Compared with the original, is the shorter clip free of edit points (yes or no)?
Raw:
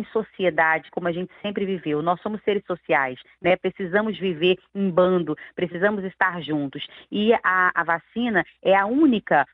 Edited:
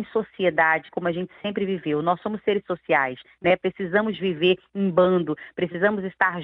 yes